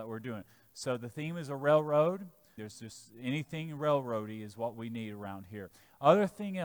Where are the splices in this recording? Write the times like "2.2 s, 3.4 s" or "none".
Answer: 2.6 s